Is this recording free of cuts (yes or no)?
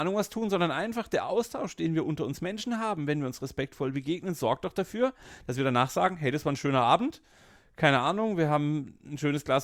yes